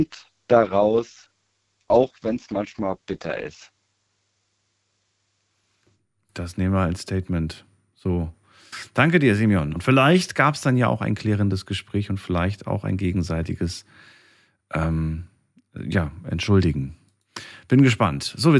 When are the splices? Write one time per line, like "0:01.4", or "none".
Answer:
0:09.8